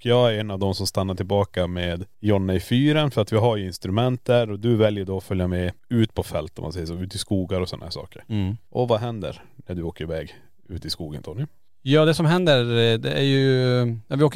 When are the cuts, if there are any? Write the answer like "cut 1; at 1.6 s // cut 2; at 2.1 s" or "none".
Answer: none